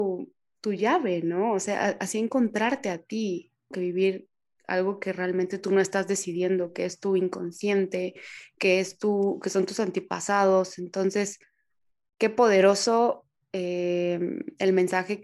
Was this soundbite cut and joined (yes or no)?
yes